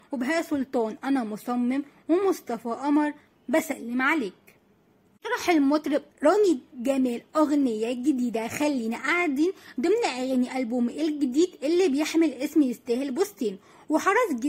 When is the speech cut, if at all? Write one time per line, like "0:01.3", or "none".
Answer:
0:06.1